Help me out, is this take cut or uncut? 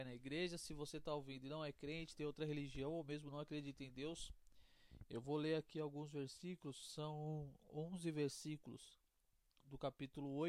uncut